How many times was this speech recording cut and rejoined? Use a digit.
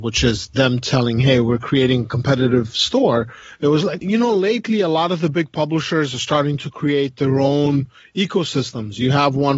1